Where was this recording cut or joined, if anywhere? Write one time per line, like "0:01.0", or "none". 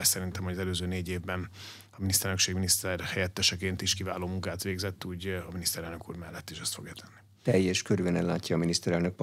none